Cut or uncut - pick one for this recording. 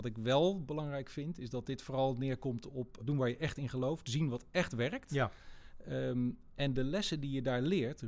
cut